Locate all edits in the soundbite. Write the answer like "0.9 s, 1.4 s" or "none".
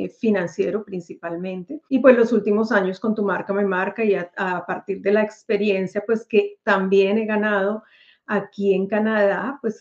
1.9 s